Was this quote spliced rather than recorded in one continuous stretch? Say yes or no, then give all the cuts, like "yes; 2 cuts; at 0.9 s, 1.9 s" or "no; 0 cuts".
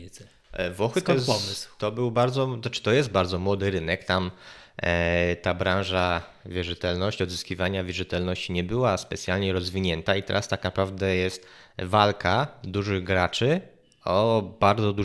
no; 0 cuts